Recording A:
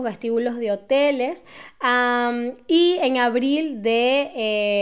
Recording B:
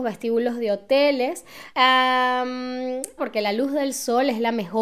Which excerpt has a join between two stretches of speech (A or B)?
B